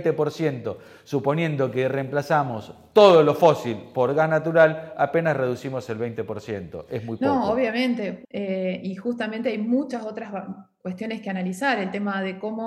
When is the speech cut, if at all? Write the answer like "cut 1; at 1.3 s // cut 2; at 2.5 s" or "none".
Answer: cut 1; at 8.2 s